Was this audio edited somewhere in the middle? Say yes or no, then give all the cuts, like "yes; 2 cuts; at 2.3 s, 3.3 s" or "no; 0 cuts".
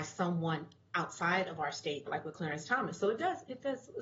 yes; 1 cut; at 2.1 s